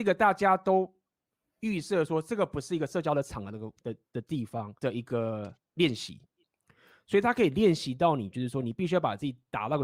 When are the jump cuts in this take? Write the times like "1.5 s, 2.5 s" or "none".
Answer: 4.8 s